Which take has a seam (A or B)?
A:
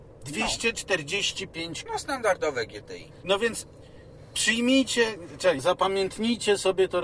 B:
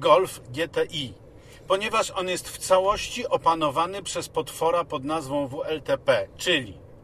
A